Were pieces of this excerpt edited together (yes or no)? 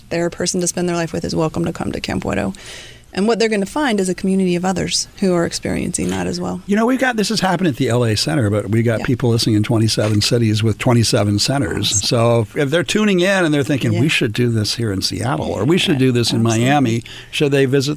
yes